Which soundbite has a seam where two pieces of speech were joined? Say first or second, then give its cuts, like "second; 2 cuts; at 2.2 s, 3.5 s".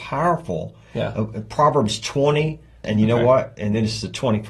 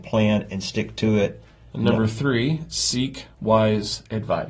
first; 1 cut; at 2.8 s